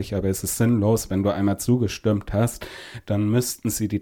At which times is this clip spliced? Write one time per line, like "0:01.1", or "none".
none